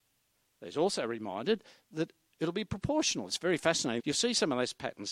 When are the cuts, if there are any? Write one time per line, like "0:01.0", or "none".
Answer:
0:04.0